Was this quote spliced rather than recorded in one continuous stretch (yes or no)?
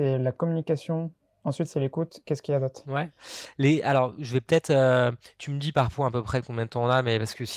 no